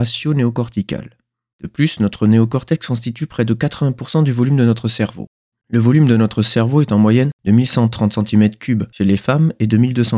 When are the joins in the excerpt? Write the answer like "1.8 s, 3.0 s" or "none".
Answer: 1.5 s, 5.5 s